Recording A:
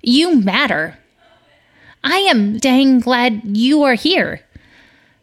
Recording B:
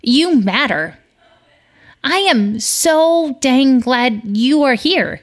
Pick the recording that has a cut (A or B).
A